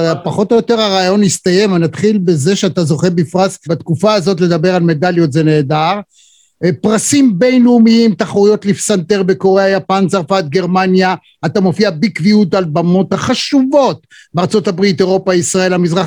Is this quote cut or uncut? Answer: cut